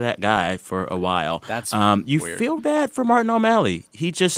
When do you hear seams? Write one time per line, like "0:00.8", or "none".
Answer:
0:02.6